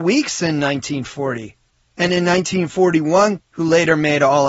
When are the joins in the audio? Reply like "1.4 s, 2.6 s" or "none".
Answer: 3.4 s